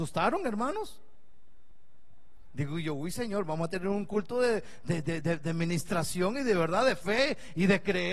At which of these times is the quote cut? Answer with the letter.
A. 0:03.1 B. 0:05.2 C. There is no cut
C